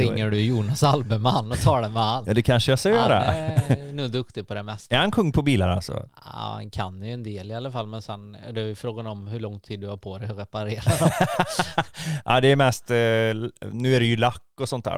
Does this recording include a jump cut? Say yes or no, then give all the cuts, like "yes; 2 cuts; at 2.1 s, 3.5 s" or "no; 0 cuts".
no; 0 cuts